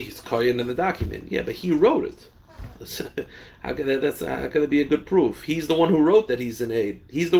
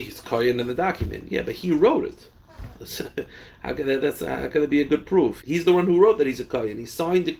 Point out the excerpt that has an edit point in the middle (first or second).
second